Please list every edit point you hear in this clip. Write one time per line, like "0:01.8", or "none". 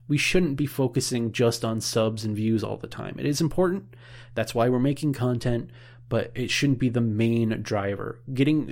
none